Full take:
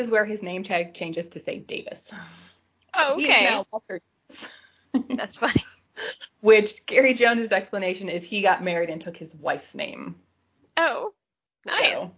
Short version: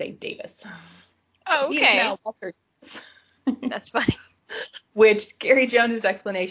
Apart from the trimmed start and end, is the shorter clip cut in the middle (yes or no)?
no